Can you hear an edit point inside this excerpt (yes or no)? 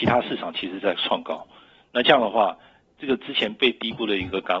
no